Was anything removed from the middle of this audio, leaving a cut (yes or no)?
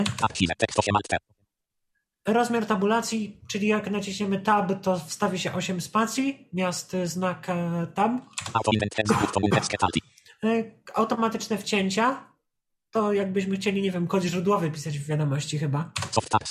no